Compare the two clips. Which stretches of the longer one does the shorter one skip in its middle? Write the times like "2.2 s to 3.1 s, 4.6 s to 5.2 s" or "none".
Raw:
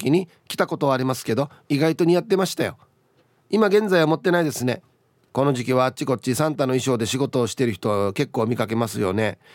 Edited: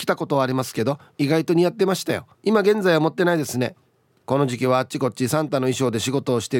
2.8 s to 3.4 s